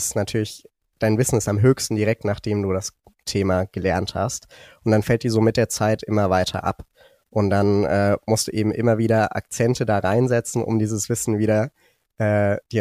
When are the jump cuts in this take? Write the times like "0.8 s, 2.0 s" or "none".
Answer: none